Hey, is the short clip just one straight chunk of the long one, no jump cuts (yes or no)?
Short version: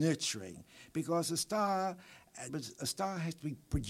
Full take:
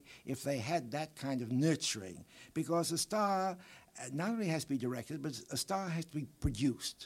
no